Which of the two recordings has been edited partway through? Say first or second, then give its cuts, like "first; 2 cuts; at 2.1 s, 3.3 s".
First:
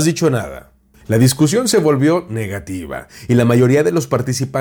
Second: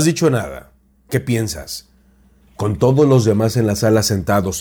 first; 1 cut; at 0.9 s